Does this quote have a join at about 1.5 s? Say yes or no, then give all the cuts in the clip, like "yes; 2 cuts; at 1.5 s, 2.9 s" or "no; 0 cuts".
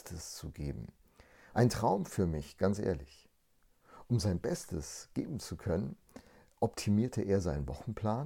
yes; 1 cut; at 1.5 s